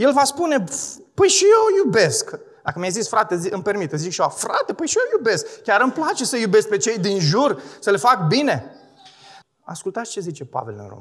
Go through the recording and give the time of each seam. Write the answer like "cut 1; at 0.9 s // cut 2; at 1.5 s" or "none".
cut 1; at 9.4 s